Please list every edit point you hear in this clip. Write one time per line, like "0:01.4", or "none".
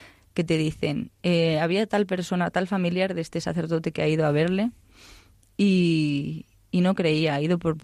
0:01.1